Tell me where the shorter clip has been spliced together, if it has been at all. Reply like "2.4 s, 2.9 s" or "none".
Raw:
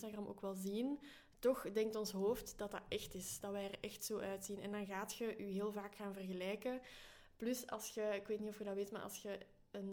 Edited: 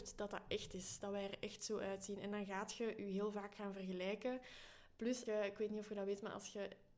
5.3 s